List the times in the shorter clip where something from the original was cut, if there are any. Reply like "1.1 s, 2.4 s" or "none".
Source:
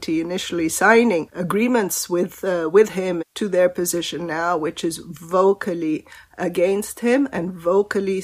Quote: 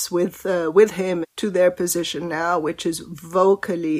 none